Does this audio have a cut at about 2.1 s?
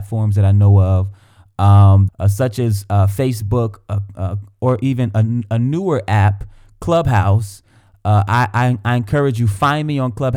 yes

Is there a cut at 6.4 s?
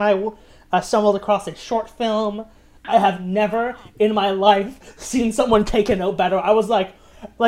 no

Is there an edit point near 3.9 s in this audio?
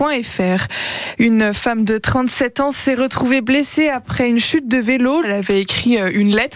no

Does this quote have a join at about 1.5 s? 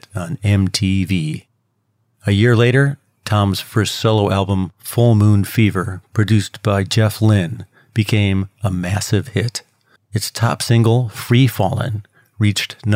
no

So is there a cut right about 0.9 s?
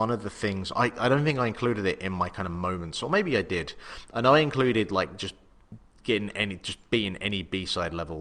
no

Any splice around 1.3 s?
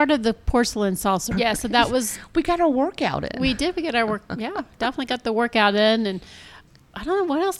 yes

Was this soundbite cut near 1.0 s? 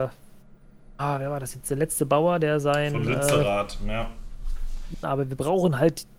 no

